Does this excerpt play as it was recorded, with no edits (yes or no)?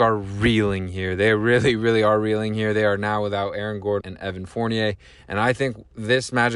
no